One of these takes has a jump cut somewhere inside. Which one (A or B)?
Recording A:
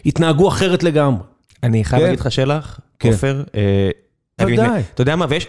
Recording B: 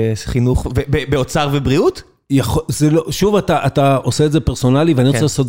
A